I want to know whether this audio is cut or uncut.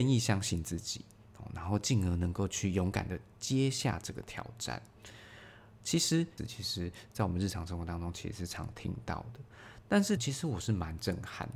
cut